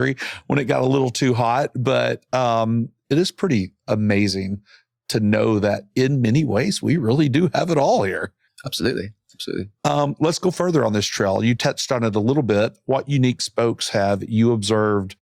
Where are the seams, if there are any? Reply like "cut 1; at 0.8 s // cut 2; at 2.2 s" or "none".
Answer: none